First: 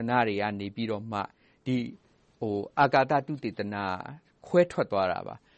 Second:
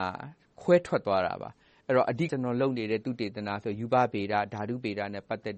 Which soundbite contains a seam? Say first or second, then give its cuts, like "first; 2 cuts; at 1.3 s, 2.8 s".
second; 1 cut; at 2.3 s